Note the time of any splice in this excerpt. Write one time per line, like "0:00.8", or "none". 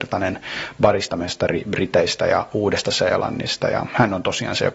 none